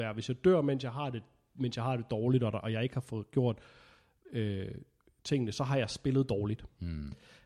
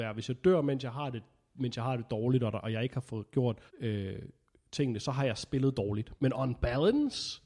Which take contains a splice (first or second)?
second